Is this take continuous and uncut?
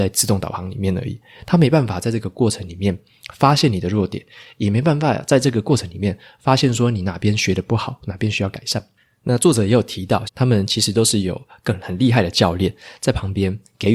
no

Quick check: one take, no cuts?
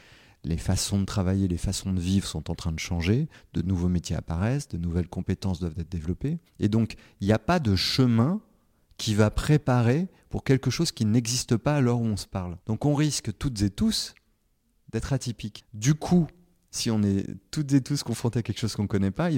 no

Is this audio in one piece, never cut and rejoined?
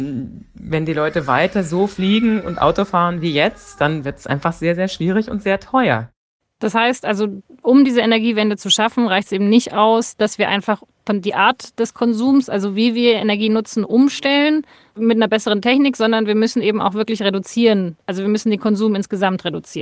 yes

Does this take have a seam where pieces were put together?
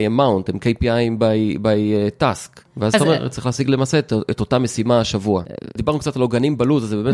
yes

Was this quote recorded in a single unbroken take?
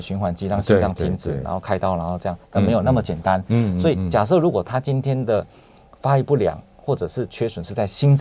yes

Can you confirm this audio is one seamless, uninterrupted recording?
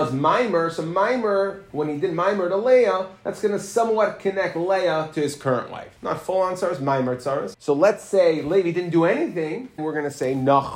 no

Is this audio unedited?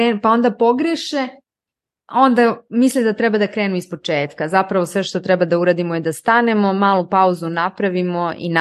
yes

